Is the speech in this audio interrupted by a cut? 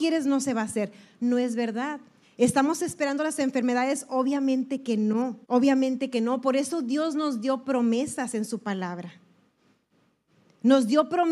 yes; 2 cuts; at 2.2 s, 5.4 s

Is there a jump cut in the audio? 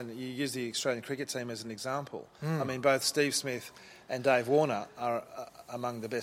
no; 0 cuts

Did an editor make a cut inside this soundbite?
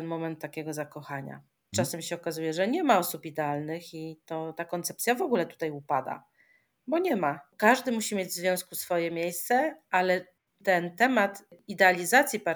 yes; 2 cuts; at 1.7 s, 7.5 s

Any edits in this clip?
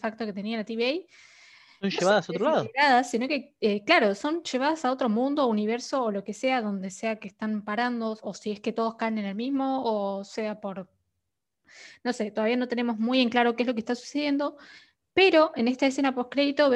no; 0 cuts

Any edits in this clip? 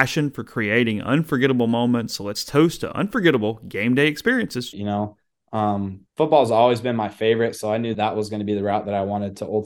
yes; 3 cuts; at 4.7 s, 6.1 s, 7.9 s

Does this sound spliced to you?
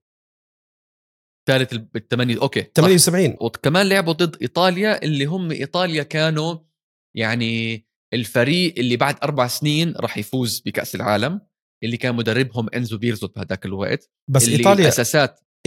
yes; 1 cut; at 3.4 s

